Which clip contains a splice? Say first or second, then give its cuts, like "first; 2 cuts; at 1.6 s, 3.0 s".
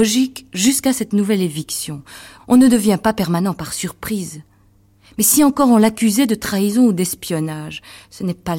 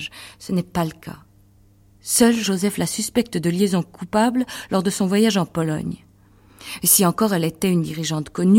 first; 1 cut; at 2.4 s